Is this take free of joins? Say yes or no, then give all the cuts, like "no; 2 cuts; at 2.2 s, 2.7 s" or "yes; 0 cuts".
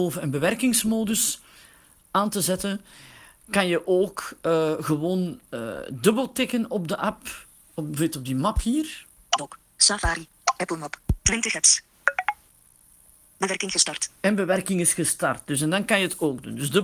yes; 0 cuts